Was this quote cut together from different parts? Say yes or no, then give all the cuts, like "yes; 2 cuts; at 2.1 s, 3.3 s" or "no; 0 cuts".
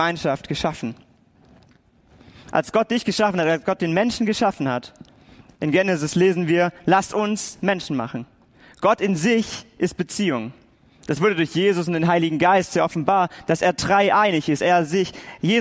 no; 0 cuts